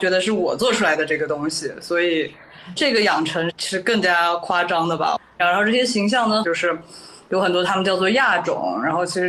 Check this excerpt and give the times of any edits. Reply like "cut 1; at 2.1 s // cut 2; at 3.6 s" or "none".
cut 1; at 3.5 s // cut 2; at 5.4 s // cut 3; at 6.4 s